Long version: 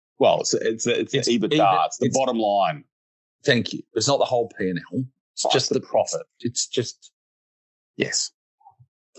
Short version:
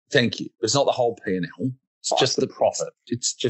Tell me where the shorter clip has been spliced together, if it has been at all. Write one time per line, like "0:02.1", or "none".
none